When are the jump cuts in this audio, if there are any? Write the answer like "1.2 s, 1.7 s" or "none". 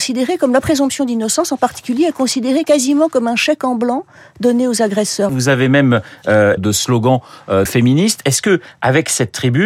5.3 s, 6.6 s, 7.7 s